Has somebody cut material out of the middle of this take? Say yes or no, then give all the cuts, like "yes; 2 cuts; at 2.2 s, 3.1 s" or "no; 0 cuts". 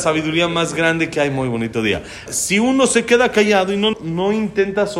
yes; 2 cuts; at 2.3 s, 3.9 s